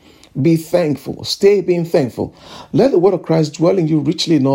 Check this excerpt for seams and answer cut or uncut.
uncut